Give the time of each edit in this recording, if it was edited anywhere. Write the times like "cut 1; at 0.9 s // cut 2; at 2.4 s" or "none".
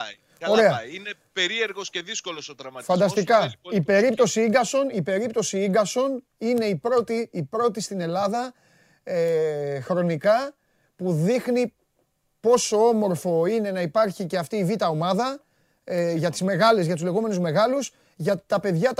none